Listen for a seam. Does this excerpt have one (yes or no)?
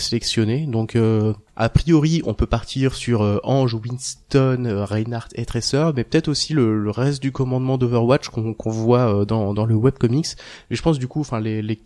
no